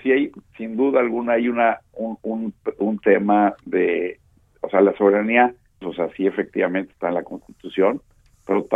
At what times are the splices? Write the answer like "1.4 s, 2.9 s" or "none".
5.8 s